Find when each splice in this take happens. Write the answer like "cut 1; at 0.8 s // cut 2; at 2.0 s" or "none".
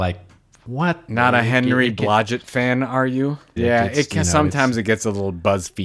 cut 1; at 3.6 s